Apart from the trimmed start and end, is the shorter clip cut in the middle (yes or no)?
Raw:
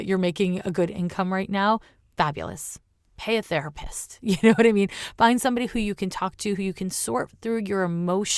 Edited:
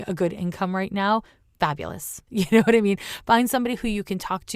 yes